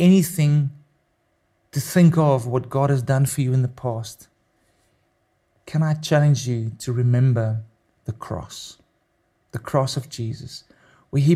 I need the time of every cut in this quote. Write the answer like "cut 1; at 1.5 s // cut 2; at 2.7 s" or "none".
none